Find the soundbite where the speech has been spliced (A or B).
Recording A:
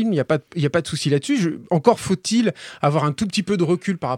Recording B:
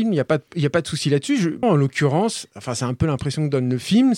B